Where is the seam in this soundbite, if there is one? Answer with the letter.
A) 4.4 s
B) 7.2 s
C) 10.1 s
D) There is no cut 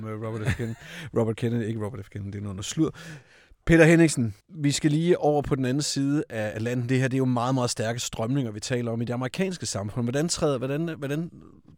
A